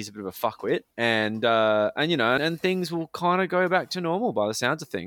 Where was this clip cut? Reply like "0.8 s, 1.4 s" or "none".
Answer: 0.9 s, 2.4 s